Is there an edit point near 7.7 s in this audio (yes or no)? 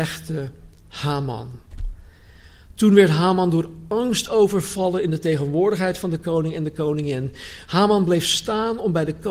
yes